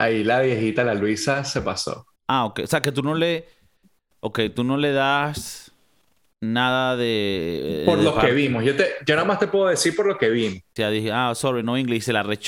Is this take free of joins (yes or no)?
no